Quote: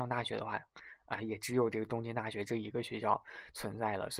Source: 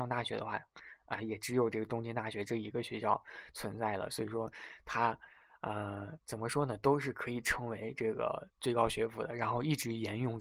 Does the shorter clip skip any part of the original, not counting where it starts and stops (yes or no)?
no